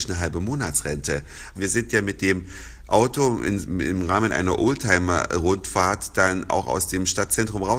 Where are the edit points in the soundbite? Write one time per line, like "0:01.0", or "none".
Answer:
0:01.6